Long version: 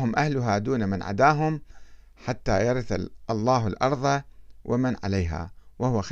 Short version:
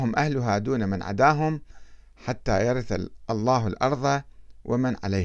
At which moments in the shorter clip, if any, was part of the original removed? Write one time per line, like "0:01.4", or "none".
none